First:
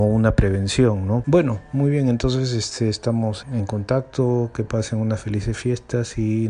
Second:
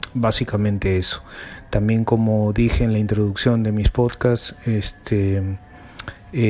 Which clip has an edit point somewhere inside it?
first; 2 cuts; at 1.2 s, 3.4 s

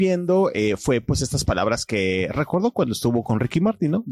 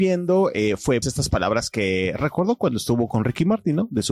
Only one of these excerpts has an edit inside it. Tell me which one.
second; 1 cut; at 1.0 s

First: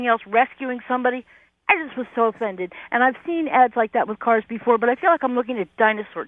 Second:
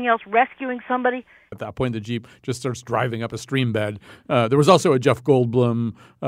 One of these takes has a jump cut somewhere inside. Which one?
second; 1 cut; at 1.5 s

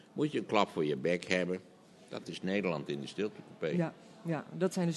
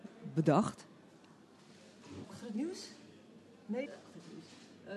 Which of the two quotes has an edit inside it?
second; 2 cuts; at 2.2 s, 3.9 s

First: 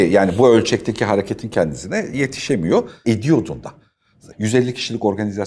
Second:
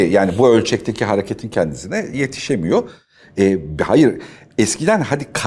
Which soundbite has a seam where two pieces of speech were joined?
first; 2 cuts; at 3.0 s, 4.3 s

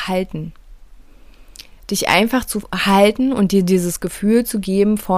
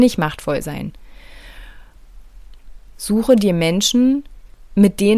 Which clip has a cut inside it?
second; 1 cut; at 2.9 s

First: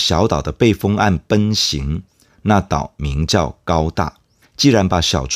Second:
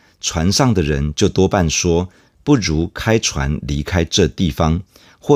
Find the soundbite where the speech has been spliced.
first; 1 cut; at 4.4 s

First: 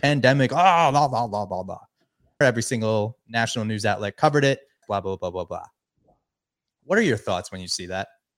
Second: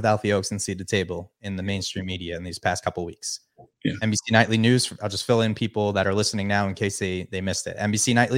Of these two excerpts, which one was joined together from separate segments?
first; 2 cuts; at 2.4 s, 4.8 s

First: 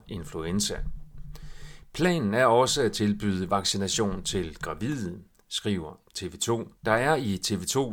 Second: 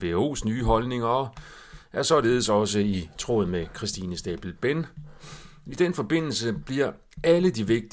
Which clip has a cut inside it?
first; 1 cut; at 6.8 s

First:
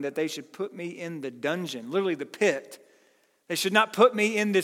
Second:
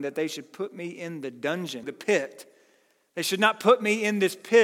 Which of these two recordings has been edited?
second; 1 cut; at 1.8 s

